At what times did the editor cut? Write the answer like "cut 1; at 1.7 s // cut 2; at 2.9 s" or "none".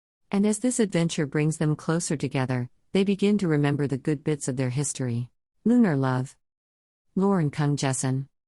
cut 1; at 5.5 s